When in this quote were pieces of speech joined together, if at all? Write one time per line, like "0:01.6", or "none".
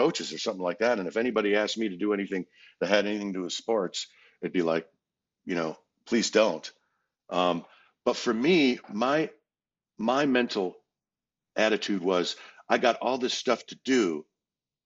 none